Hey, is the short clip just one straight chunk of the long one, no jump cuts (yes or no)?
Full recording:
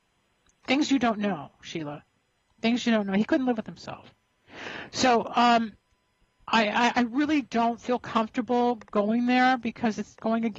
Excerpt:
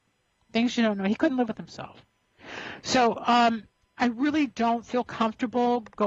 no